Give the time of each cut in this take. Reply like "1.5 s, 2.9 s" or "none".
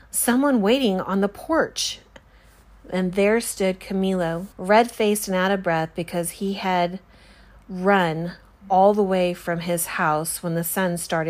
4.5 s